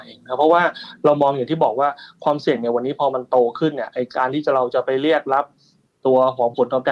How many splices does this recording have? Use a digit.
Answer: 0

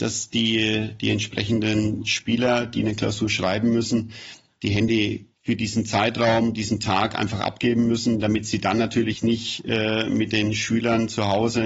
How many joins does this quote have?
1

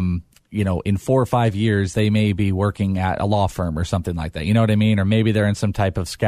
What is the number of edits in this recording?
0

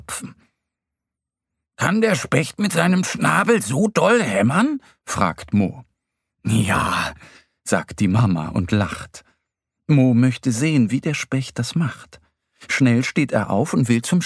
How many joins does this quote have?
0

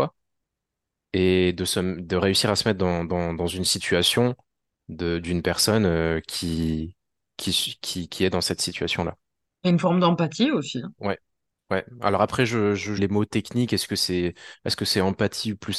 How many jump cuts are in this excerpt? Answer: 1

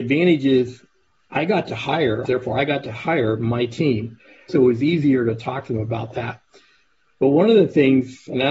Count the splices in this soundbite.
2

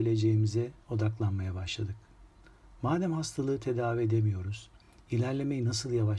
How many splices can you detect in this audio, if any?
0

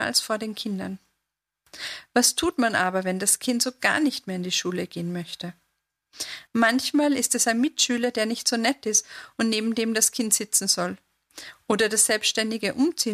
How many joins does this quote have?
1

